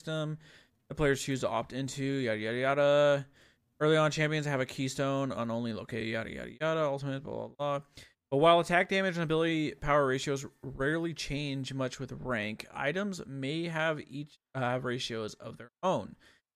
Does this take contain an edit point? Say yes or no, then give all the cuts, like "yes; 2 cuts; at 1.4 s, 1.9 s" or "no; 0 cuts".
no; 0 cuts